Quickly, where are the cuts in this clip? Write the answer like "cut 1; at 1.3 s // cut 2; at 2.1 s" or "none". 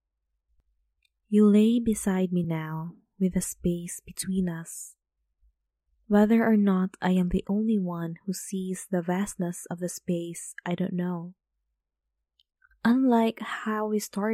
none